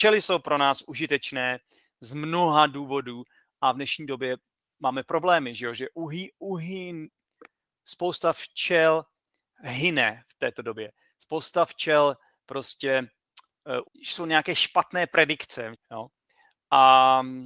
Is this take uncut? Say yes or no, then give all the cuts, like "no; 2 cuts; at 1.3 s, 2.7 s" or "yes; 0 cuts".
no; 2 cuts; at 13.8 s, 15.7 s